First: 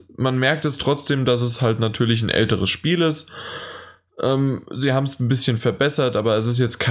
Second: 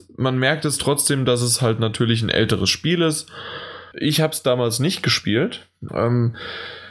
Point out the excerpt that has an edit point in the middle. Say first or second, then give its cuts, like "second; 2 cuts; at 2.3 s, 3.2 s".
second; 2 cuts; at 3.9 s, 5.9 s